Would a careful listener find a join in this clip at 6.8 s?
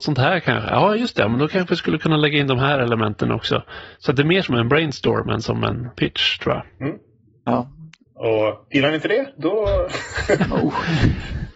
no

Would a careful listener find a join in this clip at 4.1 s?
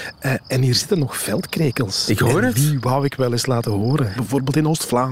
yes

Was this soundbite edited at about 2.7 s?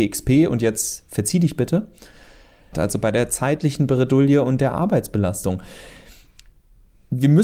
yes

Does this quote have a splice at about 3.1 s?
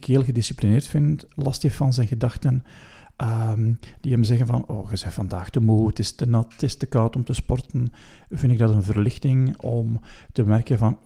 no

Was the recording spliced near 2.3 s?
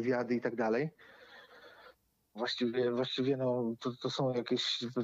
yes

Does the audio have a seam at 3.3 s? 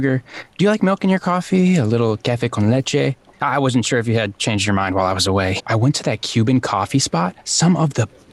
no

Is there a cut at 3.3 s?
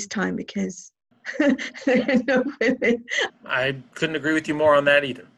yes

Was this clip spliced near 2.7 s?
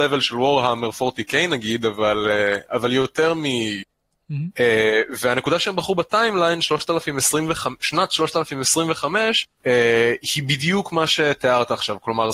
no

